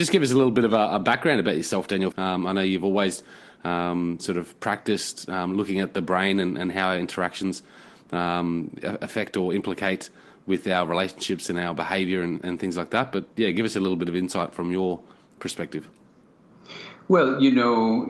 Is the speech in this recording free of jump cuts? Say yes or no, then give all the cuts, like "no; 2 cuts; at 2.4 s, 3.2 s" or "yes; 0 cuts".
no; 1 cut; at 2.1 s